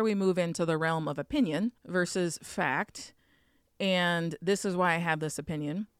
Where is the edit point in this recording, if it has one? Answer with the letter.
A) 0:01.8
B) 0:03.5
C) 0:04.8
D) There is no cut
A